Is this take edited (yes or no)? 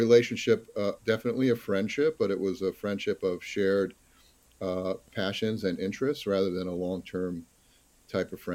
yes